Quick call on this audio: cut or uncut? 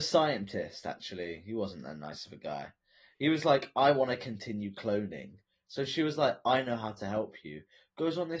uncut